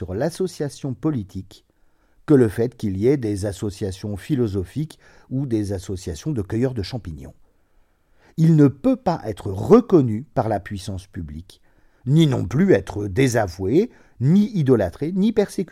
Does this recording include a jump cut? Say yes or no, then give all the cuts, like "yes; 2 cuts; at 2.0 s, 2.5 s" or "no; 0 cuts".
no; 0 cuts